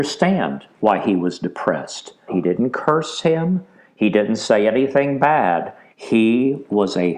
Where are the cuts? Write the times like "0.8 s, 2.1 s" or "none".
2.3 s, 5.9 s